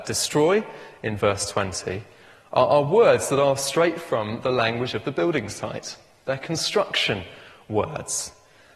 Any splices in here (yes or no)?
no